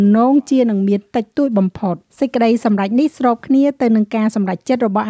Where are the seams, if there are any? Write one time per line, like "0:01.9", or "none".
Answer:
0:02.1